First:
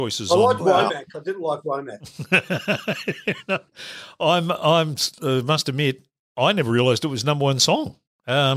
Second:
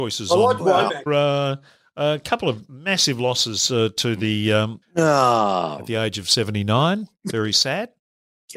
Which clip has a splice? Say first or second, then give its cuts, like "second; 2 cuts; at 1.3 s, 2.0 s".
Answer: second; 2 cuts; at 1.1 s, 4.8 s